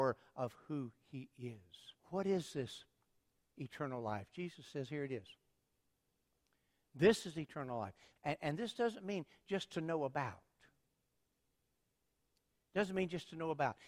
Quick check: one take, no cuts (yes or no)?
no